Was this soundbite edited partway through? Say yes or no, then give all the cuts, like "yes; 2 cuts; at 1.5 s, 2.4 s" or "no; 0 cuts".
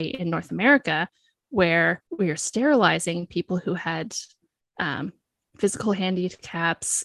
yes; 1 cut; at 2.1 s